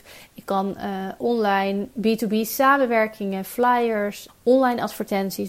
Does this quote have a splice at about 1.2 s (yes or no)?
yes